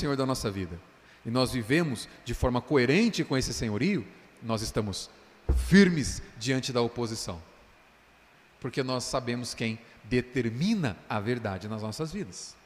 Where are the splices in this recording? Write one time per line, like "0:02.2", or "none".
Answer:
none